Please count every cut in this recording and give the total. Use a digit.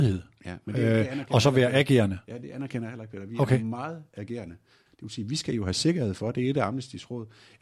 1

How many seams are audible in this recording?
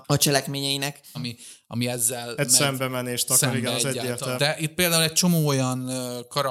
2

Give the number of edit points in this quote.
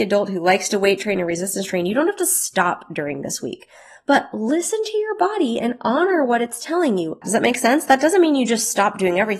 1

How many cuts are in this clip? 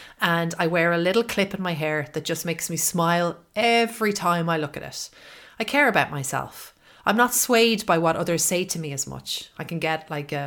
0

